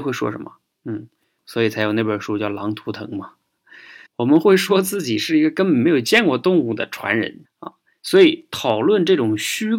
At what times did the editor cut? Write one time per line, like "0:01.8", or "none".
0:01.4
0:04.1
0:07.4